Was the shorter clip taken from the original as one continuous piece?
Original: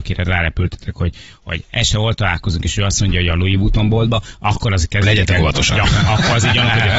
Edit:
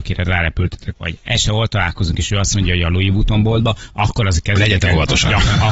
no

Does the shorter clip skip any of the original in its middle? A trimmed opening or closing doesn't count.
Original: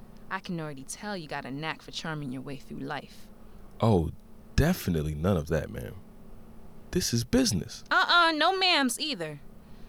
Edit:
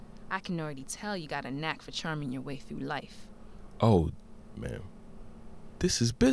yes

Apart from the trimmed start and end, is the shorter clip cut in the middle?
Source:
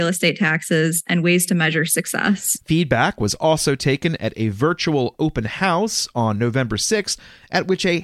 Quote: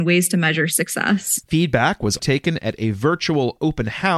yes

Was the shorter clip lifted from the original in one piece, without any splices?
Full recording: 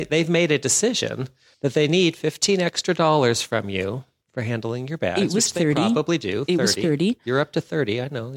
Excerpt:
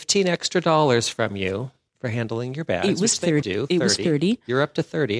no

